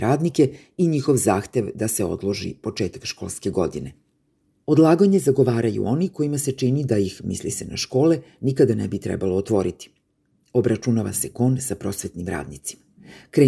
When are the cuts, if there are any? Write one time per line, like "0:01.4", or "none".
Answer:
none